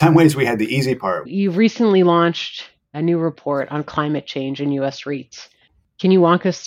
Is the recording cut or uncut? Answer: cut